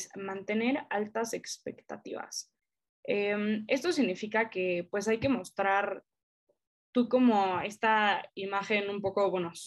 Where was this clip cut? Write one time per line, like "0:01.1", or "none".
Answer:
none